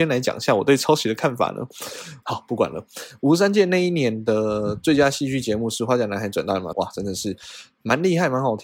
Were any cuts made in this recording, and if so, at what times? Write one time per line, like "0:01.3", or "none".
0:02.2
0:06.7